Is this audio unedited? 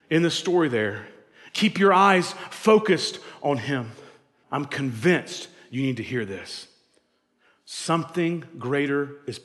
no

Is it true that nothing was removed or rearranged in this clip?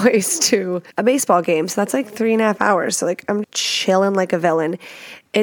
no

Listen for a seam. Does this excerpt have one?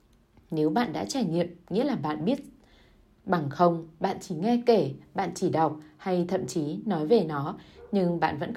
no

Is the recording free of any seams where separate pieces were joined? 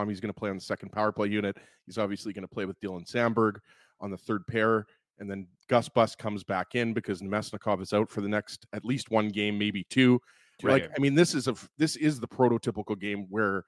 yes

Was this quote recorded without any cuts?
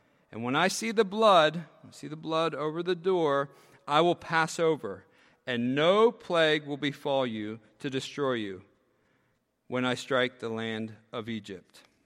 yes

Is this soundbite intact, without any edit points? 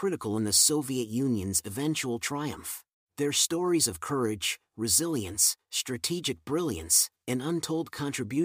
no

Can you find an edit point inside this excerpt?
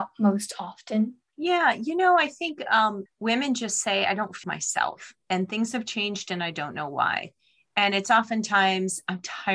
yes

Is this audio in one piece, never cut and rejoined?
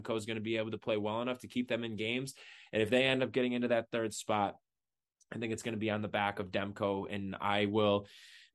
yes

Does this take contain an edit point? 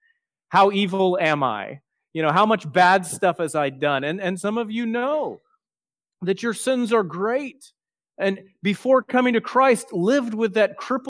no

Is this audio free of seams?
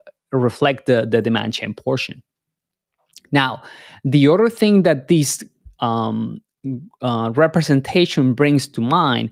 yes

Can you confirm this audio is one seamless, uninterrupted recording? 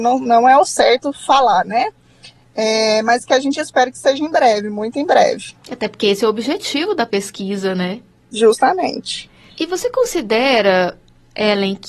no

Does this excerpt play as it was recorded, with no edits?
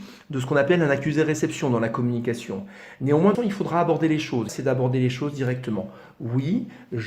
no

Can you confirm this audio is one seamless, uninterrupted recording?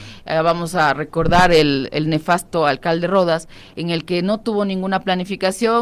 yes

